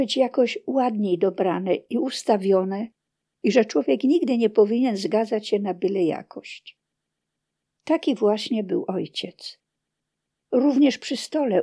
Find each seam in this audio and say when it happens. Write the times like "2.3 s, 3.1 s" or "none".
10.4 s